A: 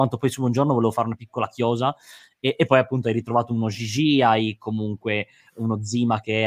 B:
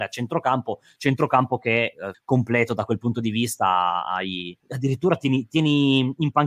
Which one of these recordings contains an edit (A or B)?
B